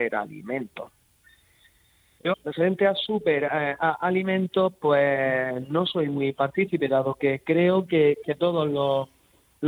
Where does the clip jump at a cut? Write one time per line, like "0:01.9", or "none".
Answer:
0:02.3

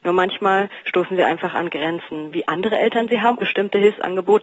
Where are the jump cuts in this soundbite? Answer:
0:02.3
0:03.4

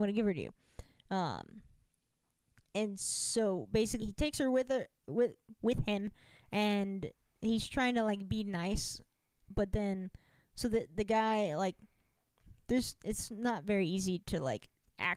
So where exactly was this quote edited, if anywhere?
0:04.0

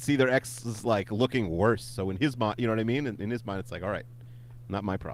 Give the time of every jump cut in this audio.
none

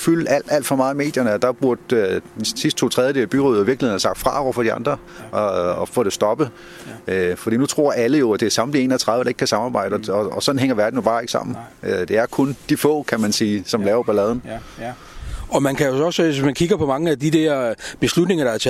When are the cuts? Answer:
0:12.6

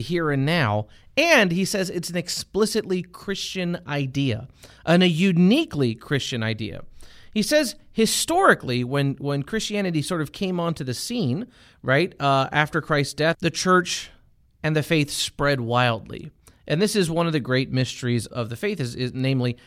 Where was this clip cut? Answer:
0:13.3
0:18.3

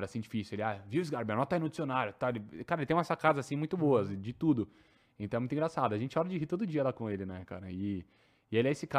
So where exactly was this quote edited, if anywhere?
none

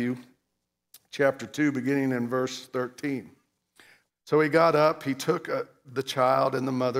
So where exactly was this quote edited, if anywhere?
0:04.1

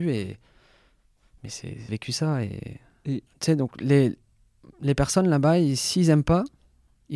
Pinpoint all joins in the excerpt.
0:01.9
0:03.3

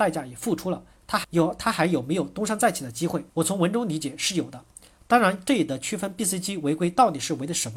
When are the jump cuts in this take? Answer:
0:01.2
0:03.3

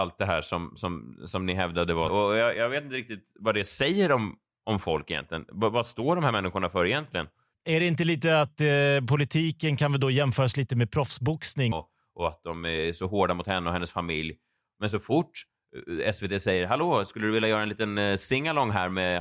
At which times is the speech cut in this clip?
0:02.1
0:11.7

